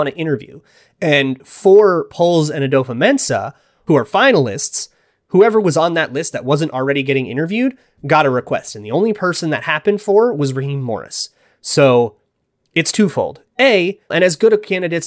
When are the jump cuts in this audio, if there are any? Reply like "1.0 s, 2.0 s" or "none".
14.1 s